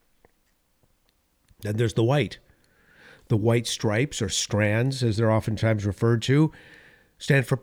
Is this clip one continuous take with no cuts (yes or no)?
yes